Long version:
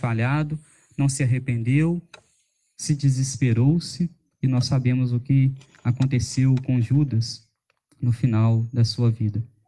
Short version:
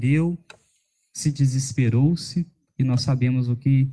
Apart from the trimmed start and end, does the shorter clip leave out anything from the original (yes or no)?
no